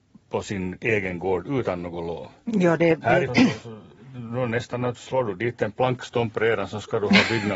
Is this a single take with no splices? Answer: no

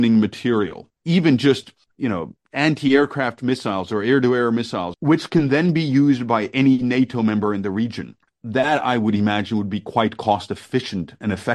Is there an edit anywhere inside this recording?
yes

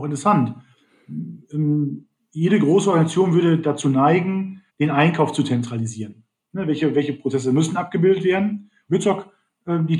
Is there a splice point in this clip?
yes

